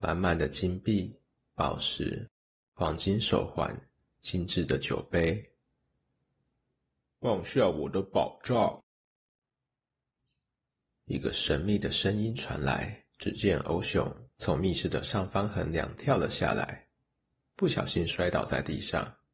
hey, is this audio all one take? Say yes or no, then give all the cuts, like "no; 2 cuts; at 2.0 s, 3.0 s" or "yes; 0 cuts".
no; 1 cut; at 13.1 s